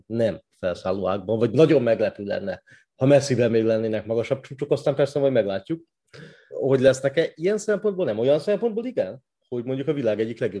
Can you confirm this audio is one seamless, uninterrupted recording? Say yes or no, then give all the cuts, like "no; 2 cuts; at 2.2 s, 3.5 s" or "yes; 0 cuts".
no; 1 cut; at 6.5 s